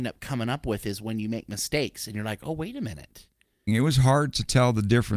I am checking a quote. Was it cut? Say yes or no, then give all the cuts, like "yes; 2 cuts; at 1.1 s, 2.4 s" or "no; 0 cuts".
yes; 1 cut; at 3.7 s